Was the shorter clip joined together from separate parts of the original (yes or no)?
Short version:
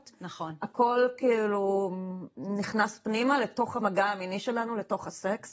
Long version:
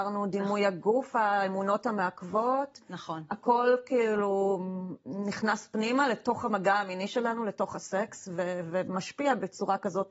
no